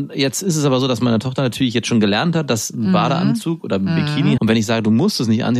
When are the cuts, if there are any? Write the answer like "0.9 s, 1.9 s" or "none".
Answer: 4.4 s